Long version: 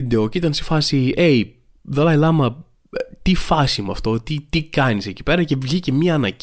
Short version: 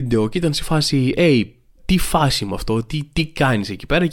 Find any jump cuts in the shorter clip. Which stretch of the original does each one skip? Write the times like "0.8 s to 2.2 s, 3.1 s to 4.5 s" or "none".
1.8 s to 3.1 s